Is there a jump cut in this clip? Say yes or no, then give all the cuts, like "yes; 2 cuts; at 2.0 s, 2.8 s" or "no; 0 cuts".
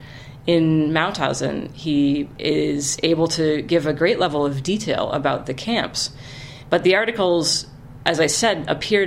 no; 0 cuts